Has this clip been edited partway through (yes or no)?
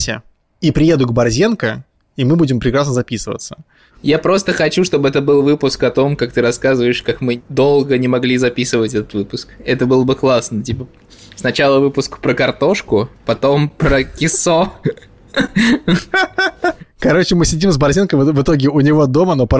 yes